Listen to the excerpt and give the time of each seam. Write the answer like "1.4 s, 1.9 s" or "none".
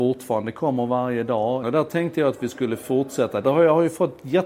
1.6 s, 3.4 s